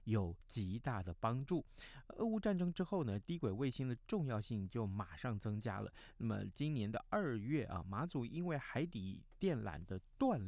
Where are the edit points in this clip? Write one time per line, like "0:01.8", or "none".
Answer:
none